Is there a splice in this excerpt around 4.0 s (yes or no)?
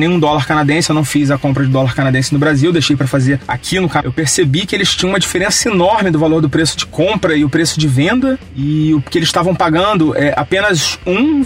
yes